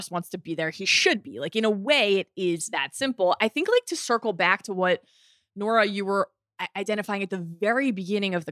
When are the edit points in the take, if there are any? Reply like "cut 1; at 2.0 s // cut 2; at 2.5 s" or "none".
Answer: none